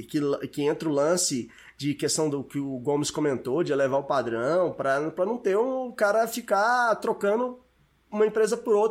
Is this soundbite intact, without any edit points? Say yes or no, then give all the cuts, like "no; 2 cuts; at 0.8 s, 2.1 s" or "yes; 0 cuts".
yes; 0 cuts